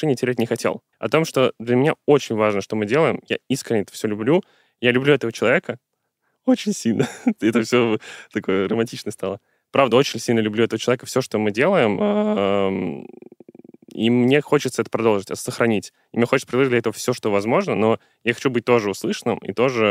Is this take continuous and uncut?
no; 1 cut; at 0.9 s

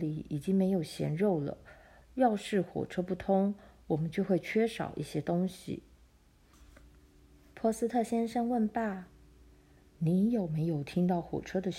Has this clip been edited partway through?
yes; 1 cut; at 2.0 s

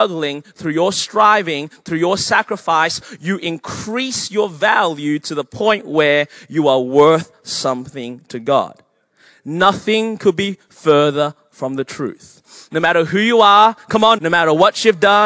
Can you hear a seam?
yes; 1 cut; at 14.2 s

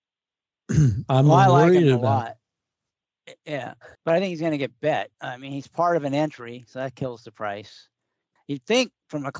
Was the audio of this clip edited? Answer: yes; 3 cuts; at 3.9 s, 5.1 s, 8.4 s

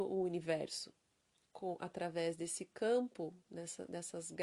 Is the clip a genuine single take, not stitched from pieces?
yes; 0 cuts

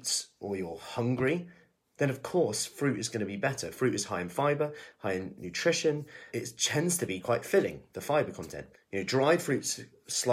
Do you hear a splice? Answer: yes; 2 cuts; at 6.3 s, 8.7 s

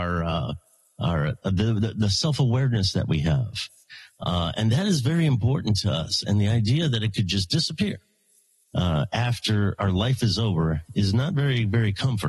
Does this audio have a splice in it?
no; 0 cuts

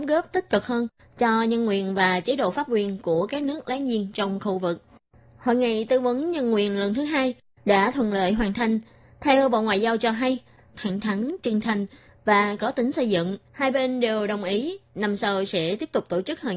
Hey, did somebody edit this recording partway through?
yes; 2 cuts; at 10.7 s, 13.4 s

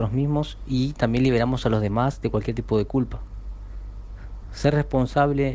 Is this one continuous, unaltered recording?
yes; 0 cuts

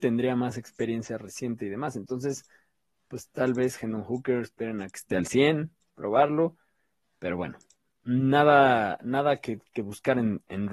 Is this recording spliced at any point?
no; 0 cuts

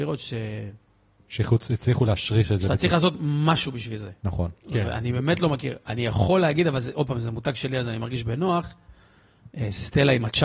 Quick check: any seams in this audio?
no; 0 cuts

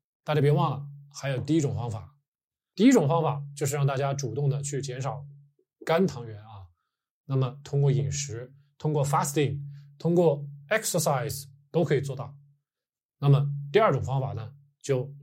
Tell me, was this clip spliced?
no; 0 cuts

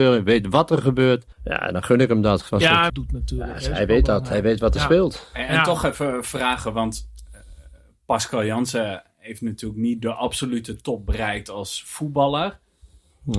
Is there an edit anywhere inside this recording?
yes; 2 cuts; at 1.3 s, 2.9 s

